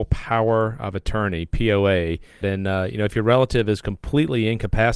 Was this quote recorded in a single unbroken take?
no; 1 cut; at 2.4 s

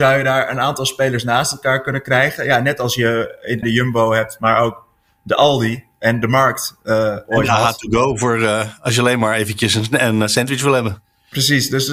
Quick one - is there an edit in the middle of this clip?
yes; 1 cut; at 3.6 s

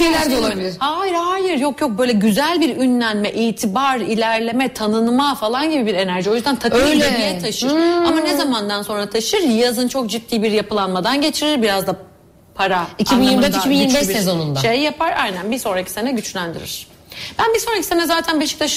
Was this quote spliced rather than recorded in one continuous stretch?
no; 0 cuts

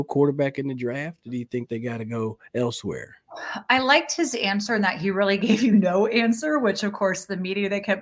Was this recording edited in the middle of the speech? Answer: no; 0 cuts

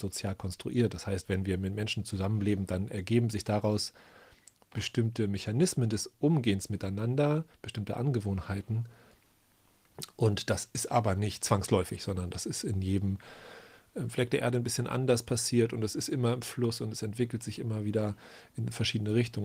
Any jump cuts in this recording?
no; 0 cuts

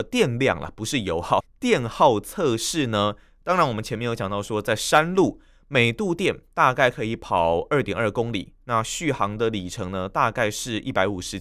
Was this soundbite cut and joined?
yes; 1 cut; at 1.4 s

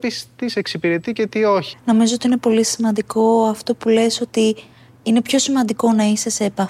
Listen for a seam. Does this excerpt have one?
yes; 1 cut; at 1.7 s

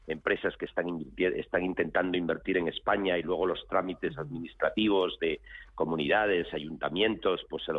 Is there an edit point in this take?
no; 0 cuts

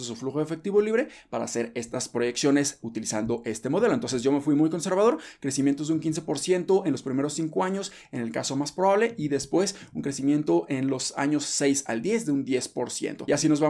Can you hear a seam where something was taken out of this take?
no; 0 cuts

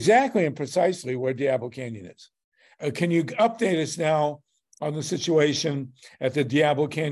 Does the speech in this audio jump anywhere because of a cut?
yes; 1 cut; at 2.7 s

